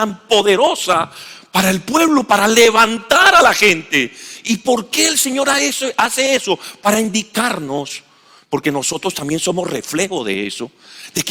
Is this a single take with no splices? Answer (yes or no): yes